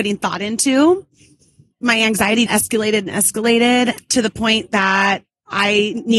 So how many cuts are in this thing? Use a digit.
1